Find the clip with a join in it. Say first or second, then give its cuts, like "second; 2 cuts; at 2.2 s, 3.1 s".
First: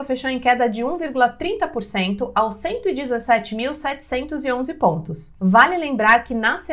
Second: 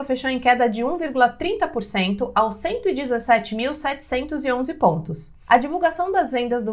first; 1 cut; at 5.4 s